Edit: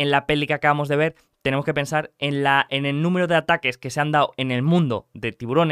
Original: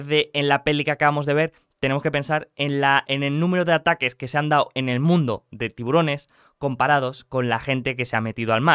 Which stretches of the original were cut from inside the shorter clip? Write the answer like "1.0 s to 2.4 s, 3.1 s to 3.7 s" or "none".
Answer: none